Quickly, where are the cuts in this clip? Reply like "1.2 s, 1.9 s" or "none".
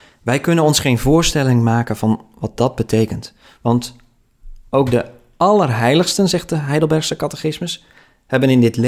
none